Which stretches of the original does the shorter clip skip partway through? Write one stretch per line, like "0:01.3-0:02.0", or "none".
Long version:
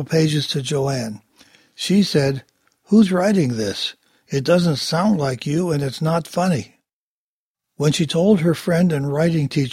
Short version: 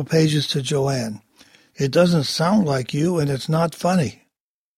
0:01.7-0:04.2